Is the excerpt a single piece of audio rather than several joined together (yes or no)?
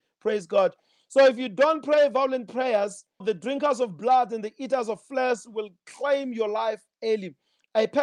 no